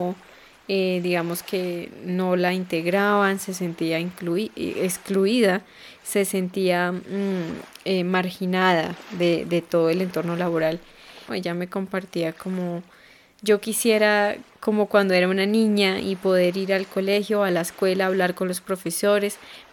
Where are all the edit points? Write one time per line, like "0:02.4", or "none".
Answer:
0:11.3